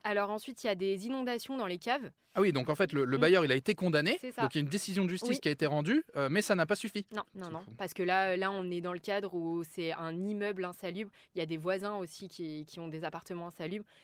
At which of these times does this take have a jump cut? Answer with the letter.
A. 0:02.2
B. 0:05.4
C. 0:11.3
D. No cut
A